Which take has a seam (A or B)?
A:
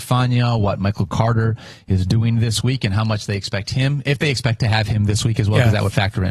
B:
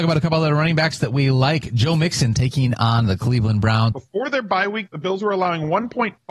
B